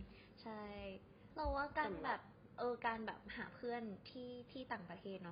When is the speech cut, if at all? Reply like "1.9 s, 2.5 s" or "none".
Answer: none